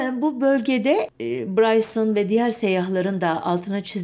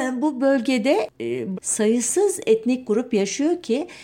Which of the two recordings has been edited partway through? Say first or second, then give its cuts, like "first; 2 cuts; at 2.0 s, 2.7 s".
second; 1 cut; at 1.5 s